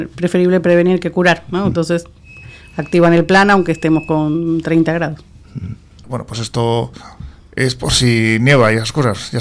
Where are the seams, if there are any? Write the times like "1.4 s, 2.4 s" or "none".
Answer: 6.0 s

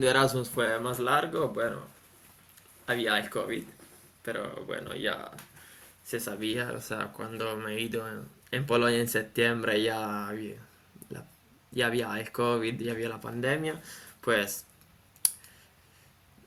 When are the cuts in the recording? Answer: none

